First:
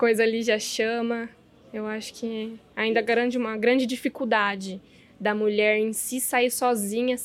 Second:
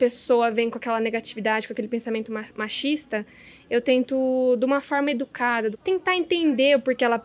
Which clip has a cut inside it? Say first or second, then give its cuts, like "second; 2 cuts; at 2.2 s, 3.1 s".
second; 1 cut; at 5.7 s